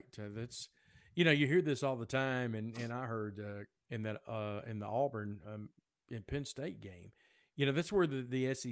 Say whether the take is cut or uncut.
cut